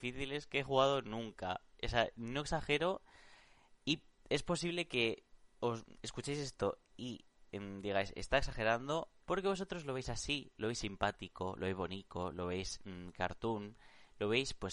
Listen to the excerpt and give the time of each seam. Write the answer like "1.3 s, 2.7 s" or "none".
9.2 s